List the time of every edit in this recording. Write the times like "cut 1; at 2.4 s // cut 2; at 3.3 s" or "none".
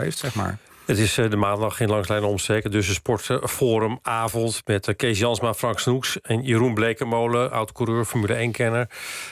none